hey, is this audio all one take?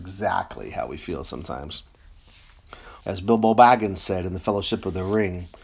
no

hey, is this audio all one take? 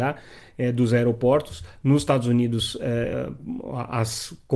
yes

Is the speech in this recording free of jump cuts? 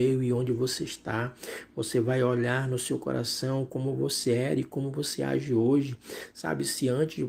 yes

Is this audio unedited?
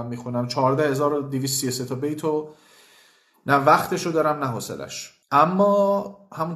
no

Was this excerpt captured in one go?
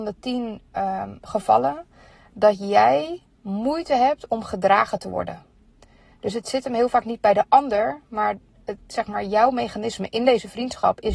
yes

